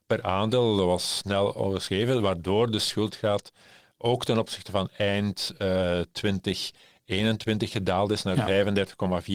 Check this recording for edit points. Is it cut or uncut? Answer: uncut